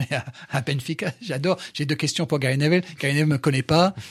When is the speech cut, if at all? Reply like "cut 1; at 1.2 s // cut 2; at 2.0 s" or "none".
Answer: none

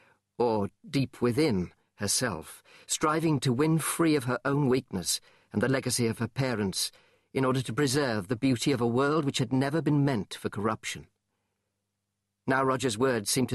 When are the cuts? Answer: none

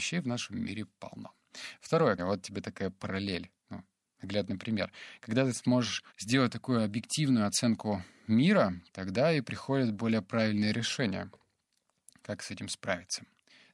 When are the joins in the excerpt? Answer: cut 1; at 2.2 s // cut 2; at 6.1 s

